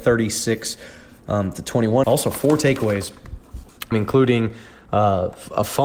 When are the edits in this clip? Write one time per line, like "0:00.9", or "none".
0:02.0
0:03.9